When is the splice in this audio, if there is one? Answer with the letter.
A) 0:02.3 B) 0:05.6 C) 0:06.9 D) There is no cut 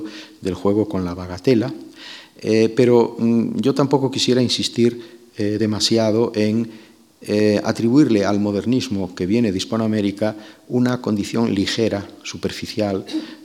D